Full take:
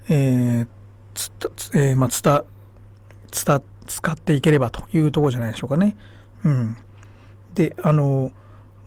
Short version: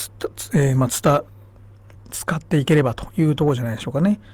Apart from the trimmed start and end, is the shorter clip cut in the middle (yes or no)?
yes